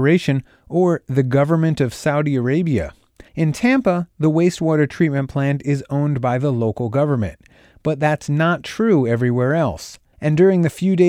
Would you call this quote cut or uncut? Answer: cut